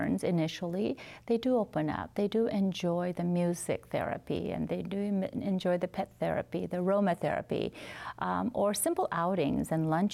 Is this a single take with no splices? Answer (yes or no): yes